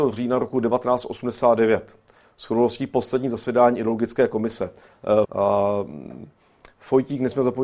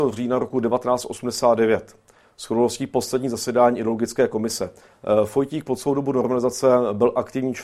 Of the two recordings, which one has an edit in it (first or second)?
first